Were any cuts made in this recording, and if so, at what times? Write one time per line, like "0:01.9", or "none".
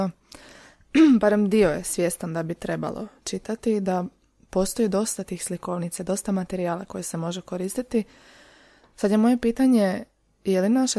none